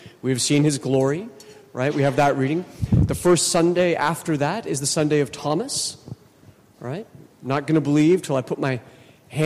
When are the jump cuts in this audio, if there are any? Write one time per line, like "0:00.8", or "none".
none